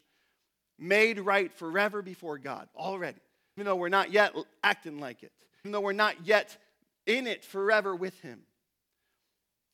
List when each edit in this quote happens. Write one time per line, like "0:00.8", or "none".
0:03.6
0:05.6